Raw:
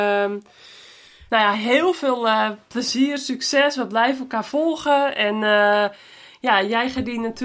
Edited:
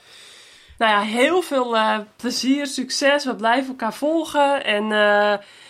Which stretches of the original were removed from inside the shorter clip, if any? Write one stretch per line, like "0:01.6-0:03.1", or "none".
none